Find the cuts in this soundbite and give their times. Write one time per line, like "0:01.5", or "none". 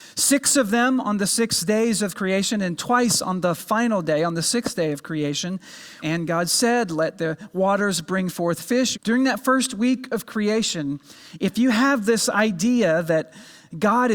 0:06.0
0:08.9